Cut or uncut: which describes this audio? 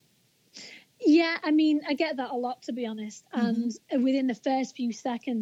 cut